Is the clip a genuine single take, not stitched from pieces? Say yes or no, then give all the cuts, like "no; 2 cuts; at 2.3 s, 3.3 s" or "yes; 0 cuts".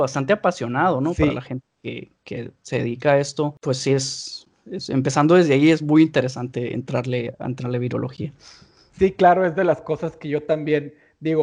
yes; 0 cuts